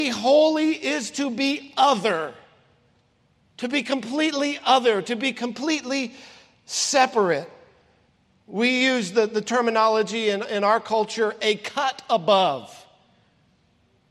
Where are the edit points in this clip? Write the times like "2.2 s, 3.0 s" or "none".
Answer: none